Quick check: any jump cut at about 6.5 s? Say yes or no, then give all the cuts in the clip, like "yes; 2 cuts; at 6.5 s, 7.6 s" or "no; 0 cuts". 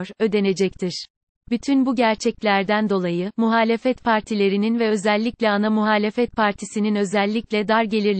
no; 1 cut; at 1.3 s